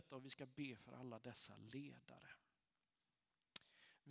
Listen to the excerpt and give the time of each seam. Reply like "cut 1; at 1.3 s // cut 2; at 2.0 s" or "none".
none